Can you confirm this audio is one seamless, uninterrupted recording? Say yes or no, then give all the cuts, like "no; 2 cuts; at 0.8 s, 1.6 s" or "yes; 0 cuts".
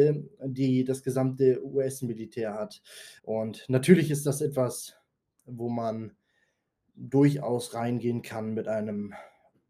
no; 1 cut; at 3.2 s